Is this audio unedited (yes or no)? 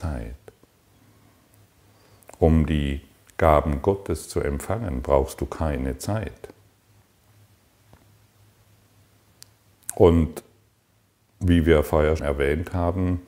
no